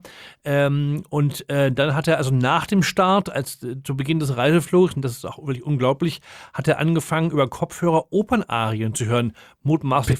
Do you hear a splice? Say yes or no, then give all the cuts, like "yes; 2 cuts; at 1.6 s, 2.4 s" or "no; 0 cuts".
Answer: no; 0 cuts